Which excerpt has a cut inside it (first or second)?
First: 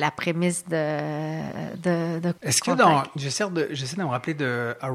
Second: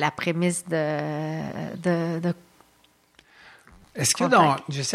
first